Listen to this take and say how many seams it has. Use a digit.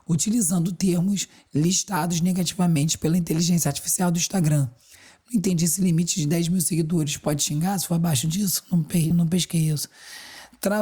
1